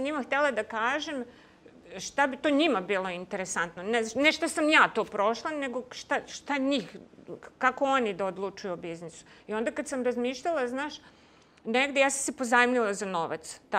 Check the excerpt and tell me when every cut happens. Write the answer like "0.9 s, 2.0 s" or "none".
none